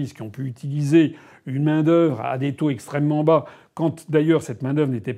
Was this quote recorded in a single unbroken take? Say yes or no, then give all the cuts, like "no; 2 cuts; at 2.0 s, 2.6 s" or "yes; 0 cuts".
yes; 0 cuts